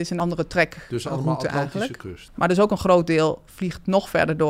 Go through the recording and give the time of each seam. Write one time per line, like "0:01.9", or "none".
0:02.3